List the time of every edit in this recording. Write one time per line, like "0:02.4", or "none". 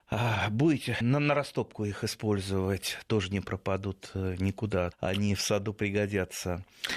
0:01.0
0:04.9